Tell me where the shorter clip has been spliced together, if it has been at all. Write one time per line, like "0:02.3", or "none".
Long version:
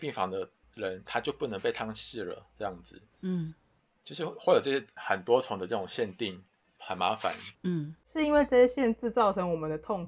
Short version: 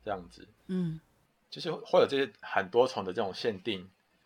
none